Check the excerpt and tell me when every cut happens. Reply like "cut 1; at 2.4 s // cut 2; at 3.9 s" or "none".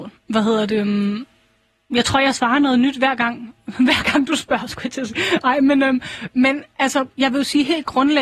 cut 1; at 7.1 s